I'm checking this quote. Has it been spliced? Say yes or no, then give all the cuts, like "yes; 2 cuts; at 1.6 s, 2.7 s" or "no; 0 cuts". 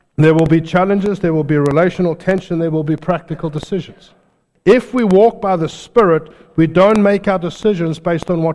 no; 0 cuts